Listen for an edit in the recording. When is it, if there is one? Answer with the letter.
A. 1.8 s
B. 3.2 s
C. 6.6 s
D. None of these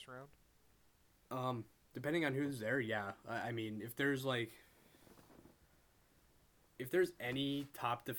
D